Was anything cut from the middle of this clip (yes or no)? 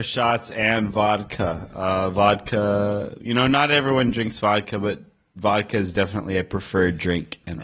no